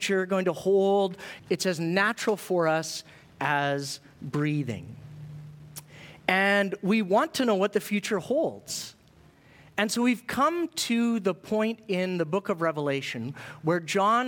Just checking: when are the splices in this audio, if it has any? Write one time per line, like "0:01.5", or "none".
0:01.4